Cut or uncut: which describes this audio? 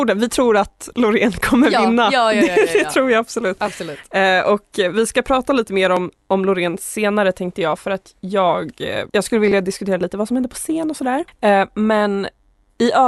cut